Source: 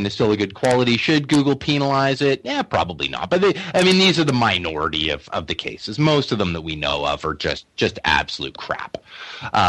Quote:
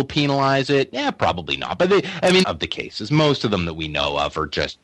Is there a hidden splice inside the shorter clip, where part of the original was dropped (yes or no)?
yes